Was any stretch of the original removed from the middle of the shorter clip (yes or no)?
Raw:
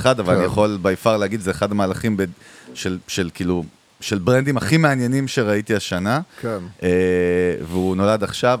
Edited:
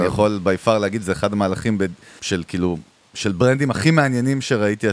yes